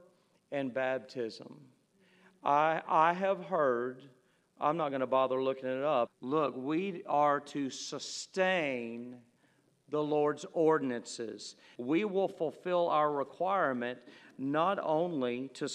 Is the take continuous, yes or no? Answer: no